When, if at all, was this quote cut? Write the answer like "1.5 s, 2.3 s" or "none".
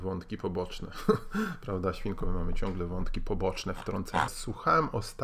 4.3 s

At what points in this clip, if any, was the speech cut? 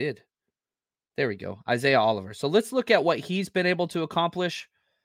none

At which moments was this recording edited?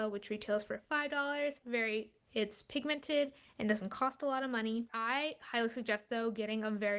1.6 s, 4.9 s

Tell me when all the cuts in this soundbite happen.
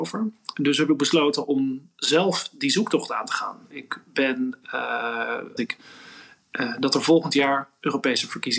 3.7 s, 5.6 s

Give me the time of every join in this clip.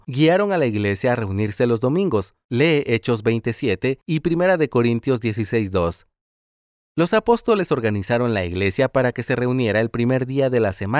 none

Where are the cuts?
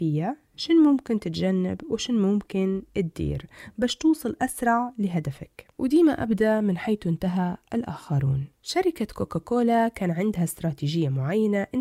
5.7 s, 8.5 s

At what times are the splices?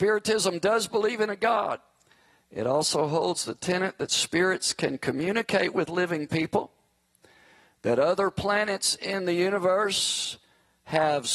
none

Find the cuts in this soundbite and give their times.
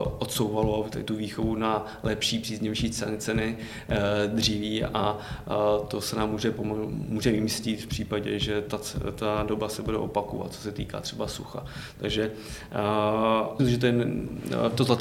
13.6 s

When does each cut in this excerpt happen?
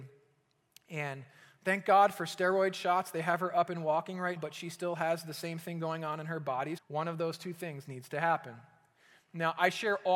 4.4 s, 6.8 s

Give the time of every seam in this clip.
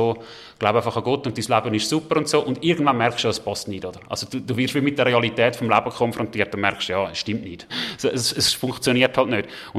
7.7 s

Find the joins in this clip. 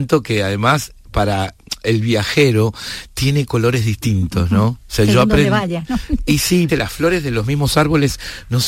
6.7 s

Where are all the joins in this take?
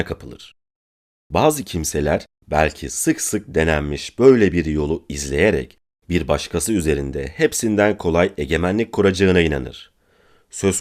none

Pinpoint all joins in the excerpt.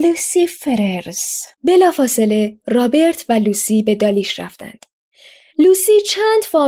1.5 s

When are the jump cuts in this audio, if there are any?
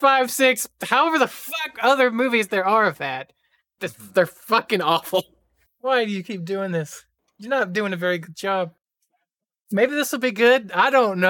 5.7 s

